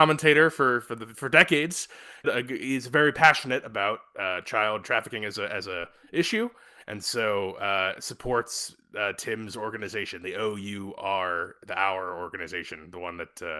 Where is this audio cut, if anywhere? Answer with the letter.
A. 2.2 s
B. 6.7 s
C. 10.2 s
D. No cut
A